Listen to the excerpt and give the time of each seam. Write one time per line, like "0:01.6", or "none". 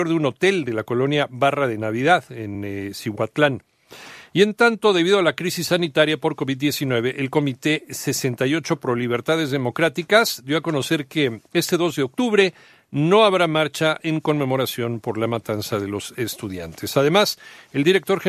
none